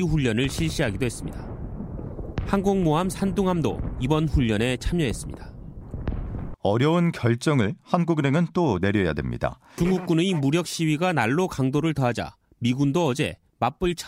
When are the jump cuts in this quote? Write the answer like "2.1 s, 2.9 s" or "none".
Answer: 6.5 s, 9.8 s